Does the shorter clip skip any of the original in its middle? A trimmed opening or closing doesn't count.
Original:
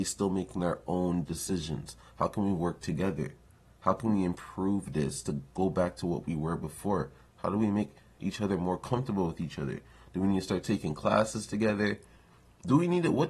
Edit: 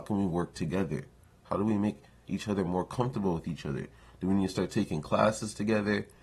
yes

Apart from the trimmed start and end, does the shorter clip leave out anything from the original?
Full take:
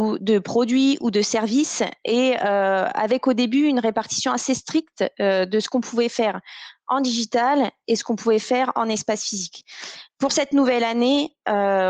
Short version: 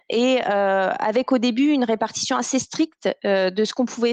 no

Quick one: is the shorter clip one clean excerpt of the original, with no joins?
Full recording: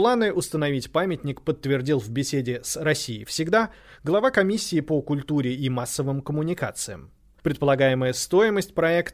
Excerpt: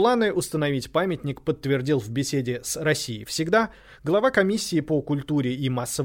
yes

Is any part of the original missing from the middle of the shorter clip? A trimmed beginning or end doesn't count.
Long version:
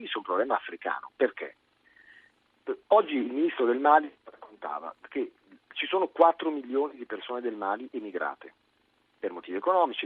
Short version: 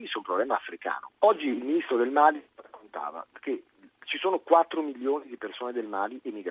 yes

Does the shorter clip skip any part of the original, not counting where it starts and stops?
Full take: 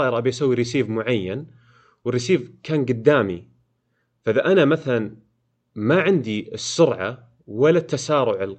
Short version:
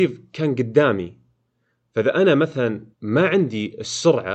yes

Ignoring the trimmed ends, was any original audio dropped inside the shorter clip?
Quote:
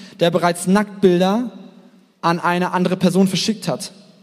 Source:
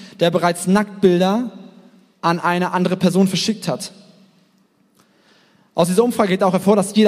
no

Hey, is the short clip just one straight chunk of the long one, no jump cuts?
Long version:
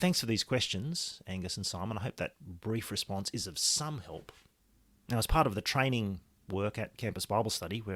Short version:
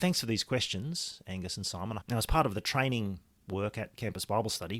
no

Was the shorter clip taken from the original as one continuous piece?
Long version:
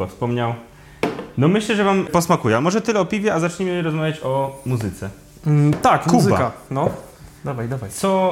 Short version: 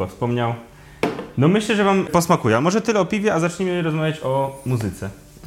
yes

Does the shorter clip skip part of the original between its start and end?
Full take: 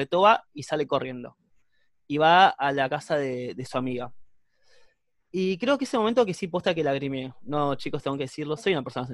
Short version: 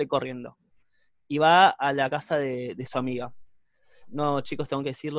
yes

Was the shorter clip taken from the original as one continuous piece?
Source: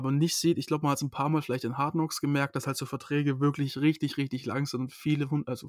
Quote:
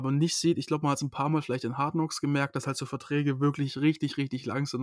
yes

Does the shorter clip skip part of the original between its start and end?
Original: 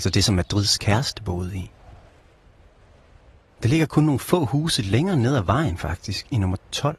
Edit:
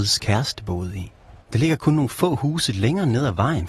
yes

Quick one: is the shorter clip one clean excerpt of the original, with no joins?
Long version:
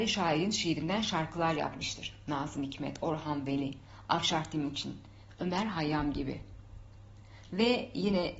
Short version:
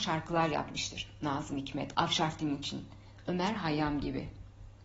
no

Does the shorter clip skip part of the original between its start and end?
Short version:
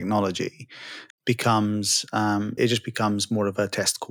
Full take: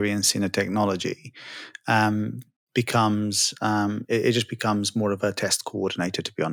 yes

